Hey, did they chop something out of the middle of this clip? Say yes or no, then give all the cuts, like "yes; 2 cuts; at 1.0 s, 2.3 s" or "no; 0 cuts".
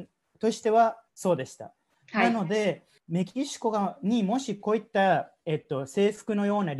yes; 1 cut; at 1.1 s